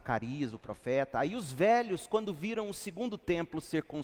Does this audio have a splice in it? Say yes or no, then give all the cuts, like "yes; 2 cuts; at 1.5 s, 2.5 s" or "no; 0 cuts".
no; 0 cuts